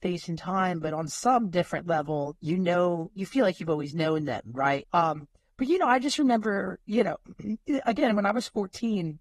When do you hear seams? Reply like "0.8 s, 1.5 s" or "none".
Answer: 4.8 s

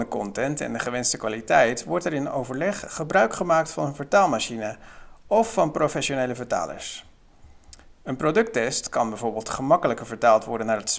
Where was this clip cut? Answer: none

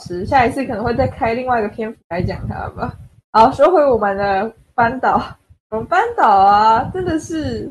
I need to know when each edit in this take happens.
none

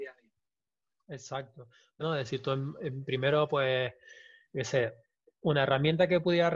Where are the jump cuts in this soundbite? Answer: 2.0 s

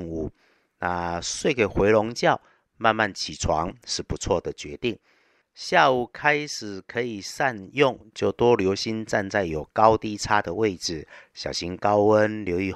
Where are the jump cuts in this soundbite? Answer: 5.4 s

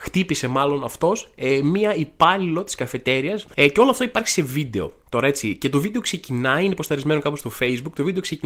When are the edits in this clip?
3.5 s

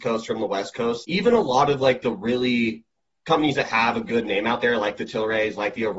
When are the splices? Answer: none

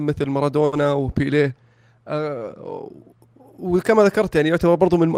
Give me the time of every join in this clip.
none

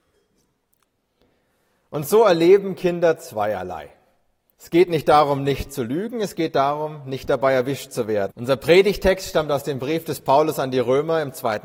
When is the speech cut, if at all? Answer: 4.5 s, 8.3 s

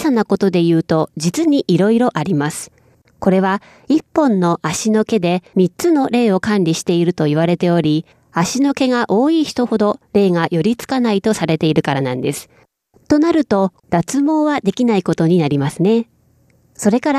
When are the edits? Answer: 3.0 s, 13.8 s

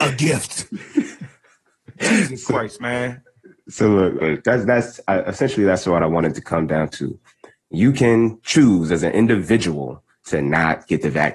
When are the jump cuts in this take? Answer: 4.2 s

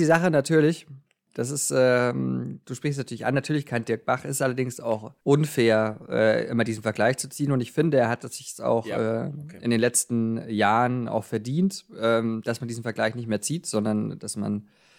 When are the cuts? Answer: 5.2 s

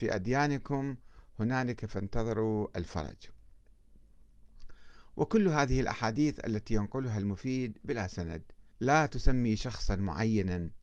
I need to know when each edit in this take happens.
8.7 s

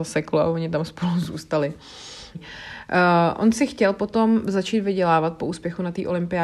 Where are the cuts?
2.3 s

